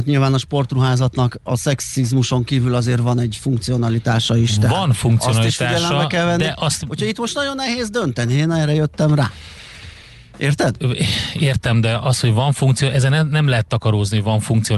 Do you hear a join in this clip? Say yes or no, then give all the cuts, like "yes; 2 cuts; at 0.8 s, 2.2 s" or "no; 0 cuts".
no; 0 cuts